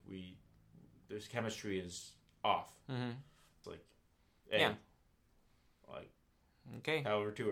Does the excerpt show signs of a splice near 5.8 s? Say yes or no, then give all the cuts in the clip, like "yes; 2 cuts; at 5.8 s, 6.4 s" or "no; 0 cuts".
no; 1 cut; at 3.6 s